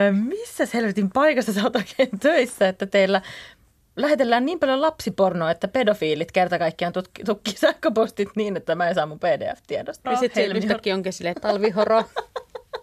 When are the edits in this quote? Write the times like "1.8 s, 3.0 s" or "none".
10.0 s, 11.3 s

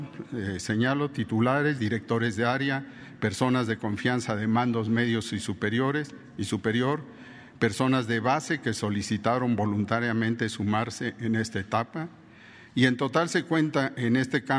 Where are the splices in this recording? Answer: 1.8 s

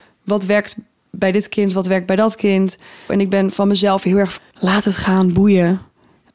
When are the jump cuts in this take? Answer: 3.1 s, 4.4 s

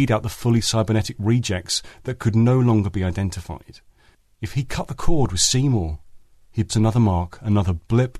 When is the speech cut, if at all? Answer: 6.7 s

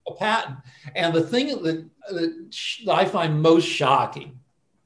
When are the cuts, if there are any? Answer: 2.0 s

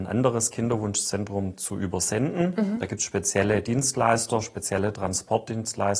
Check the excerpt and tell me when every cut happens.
none

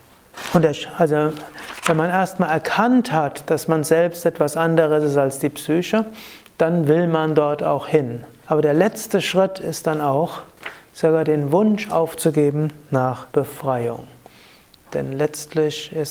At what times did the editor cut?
8.4 s, 13.3 s

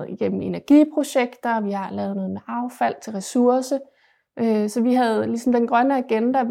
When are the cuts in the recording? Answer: none

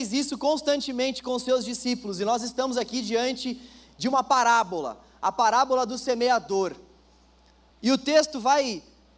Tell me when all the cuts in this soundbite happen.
7.7 s

